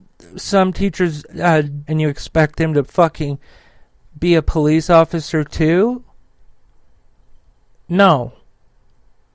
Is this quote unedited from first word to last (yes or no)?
no